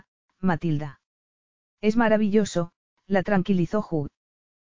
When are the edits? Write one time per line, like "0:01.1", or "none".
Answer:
none